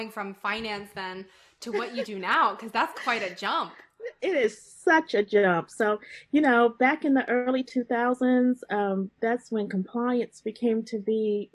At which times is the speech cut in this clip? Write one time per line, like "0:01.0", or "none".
0:05.7